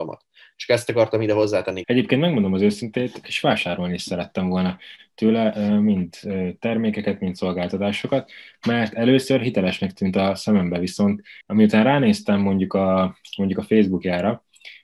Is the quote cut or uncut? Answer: cut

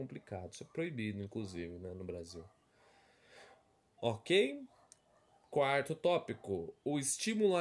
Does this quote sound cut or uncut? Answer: uncut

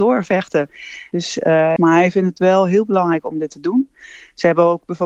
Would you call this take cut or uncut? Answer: cut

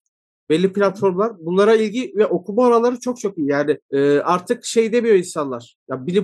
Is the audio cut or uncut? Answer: cut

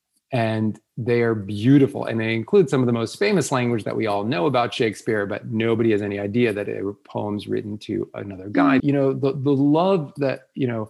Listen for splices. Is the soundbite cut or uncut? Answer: cut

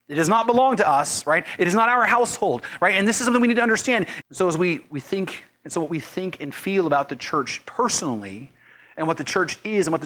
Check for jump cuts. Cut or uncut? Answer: cut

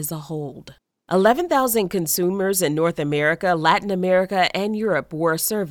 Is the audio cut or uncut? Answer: cut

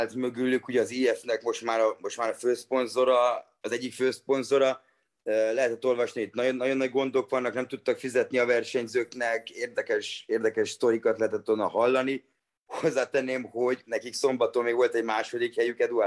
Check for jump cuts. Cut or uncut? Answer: cut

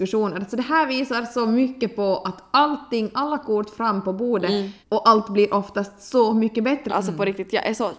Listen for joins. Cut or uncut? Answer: cut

